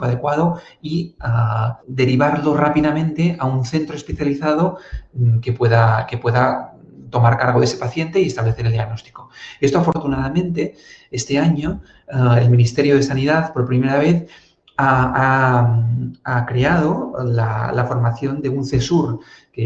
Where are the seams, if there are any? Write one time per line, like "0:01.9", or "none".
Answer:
0:01.8